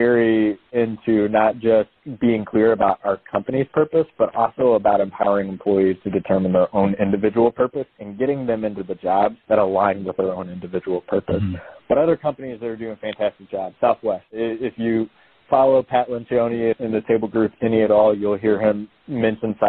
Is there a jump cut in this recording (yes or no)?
yes